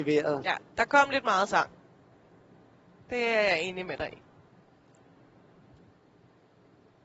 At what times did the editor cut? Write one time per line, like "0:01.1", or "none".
none